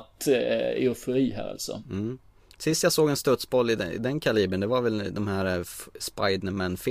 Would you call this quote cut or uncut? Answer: uncut